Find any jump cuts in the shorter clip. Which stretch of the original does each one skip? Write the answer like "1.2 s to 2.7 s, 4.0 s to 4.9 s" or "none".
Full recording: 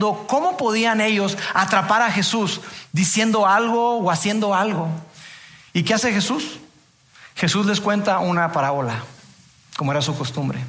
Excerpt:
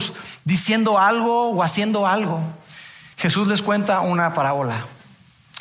5.6 s to 7.3 s